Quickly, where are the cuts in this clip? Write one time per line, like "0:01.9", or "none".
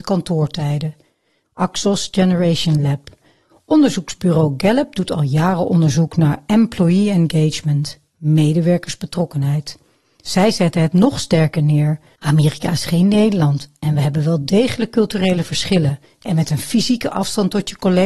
0:01.4
0:12.1
0:16.0

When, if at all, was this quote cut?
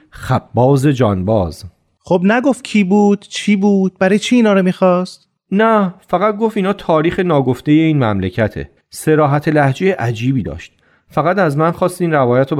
0:08.8

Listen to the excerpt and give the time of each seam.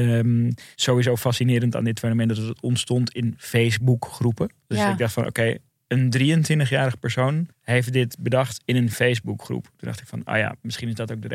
0:07.5

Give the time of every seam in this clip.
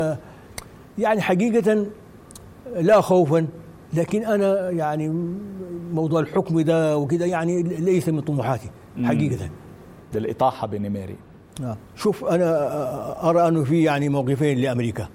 0:10.1
0:11.8

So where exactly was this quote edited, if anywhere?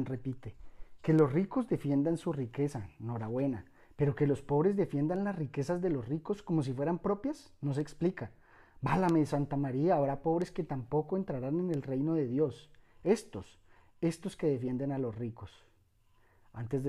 none

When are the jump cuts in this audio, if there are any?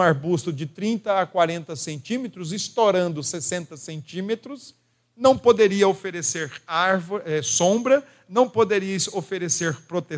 none

